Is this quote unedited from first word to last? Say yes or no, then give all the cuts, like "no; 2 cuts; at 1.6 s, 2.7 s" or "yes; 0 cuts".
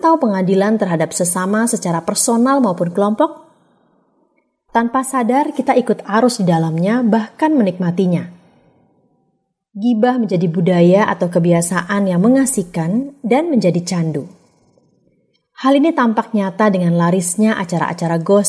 no; 1 cut; at 4.7 s